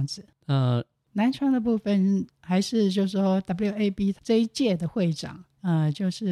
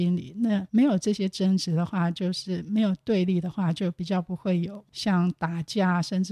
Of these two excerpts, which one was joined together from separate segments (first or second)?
first